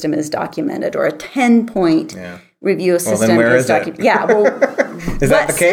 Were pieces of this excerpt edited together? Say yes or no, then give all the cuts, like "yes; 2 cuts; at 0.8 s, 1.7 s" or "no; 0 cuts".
no; 0 cuts